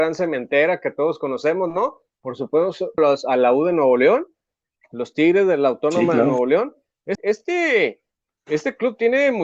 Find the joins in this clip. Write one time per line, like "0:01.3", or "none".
0:03.0
0:07.1